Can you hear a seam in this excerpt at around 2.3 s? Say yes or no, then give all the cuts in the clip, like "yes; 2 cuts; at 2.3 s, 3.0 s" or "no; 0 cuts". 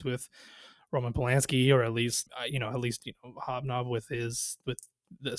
yes; 1 cut; at 2.3 s